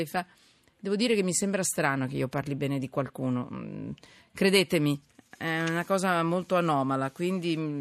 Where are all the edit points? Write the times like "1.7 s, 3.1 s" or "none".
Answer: none